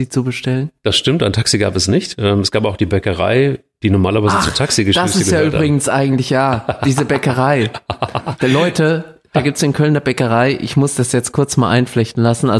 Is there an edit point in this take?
no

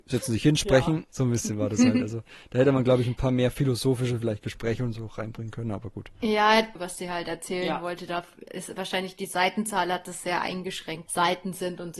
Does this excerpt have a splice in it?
yes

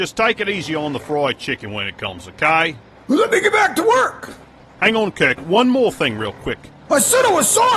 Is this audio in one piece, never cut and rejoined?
yes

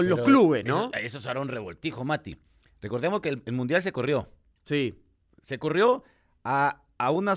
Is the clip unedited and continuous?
yes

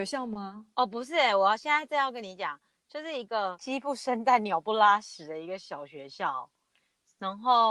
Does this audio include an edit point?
no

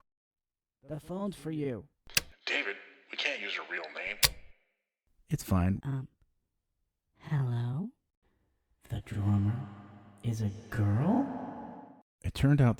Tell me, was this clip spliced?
yes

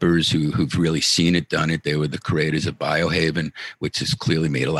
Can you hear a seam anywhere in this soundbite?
no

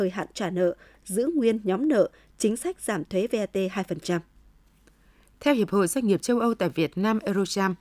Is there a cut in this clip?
no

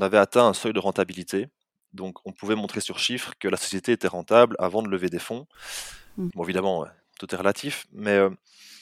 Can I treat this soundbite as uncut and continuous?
no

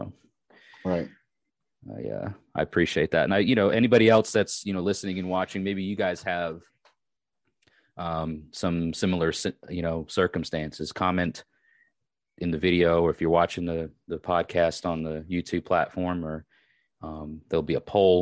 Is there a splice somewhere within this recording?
no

